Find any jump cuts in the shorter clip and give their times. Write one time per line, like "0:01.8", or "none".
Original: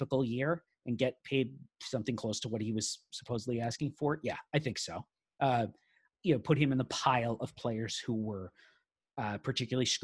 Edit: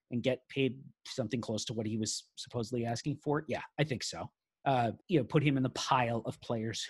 0:05.0